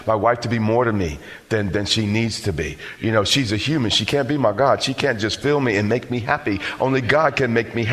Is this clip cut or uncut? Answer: uncut